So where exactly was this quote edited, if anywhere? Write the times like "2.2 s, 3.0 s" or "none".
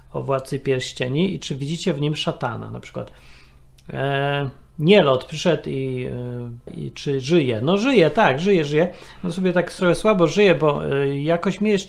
6.7 s